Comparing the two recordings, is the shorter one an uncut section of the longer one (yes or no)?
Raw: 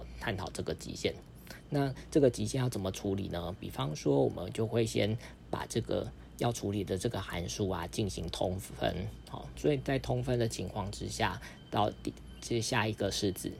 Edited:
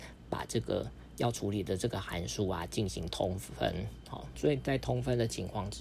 yes